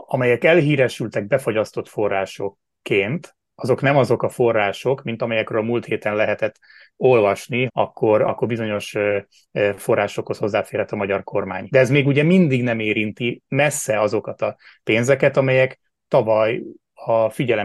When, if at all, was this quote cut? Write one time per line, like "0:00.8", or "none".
0:07.7
0:11.7

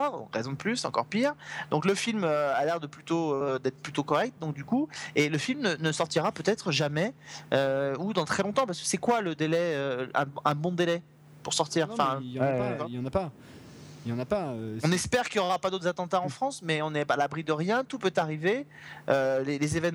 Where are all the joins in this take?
none

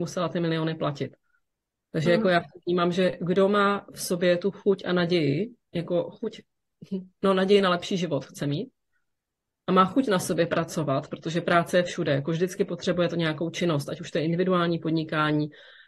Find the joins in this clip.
none

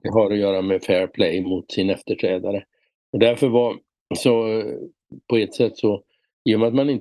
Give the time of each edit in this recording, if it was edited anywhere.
none

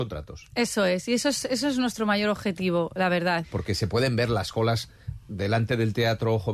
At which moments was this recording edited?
0:03.4

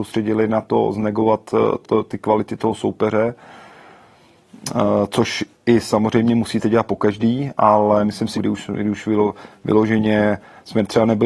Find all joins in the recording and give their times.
0:01.8
0:08.4

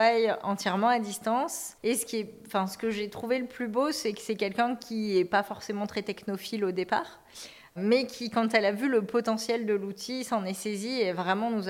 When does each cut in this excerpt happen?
none

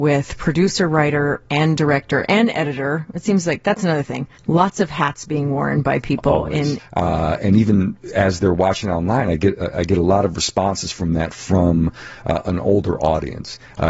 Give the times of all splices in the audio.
0:04.4
0:06.8

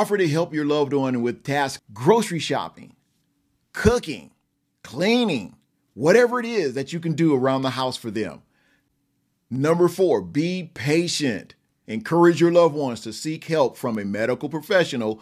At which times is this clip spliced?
0:01.8
0:11.8

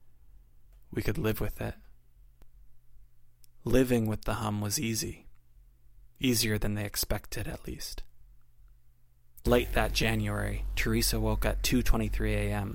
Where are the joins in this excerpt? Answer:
0:06.1
0:09.4

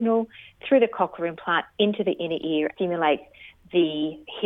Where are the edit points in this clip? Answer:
0:02.7

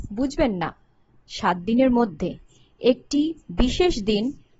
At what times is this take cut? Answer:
none

